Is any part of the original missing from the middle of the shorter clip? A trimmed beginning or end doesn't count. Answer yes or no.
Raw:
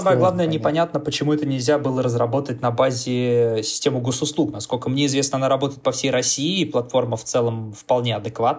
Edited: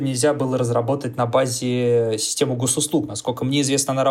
no